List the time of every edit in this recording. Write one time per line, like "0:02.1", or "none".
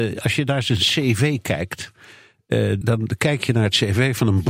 0:02.8